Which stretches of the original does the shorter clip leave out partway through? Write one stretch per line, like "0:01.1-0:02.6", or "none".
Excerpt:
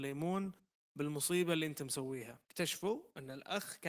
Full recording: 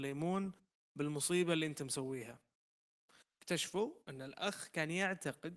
0:02.4-0:03.4